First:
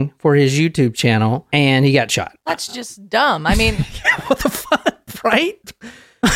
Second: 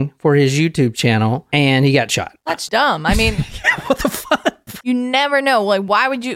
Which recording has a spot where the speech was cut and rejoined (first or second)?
second